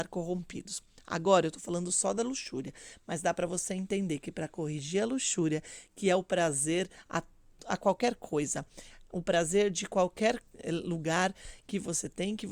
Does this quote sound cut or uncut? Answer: uncut